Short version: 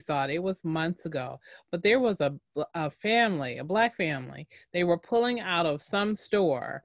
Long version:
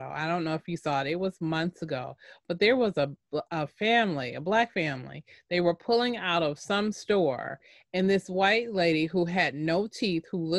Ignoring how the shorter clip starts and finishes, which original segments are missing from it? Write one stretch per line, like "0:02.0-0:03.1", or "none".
none